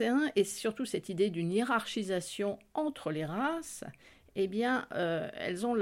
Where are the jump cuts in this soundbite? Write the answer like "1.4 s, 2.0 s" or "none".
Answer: none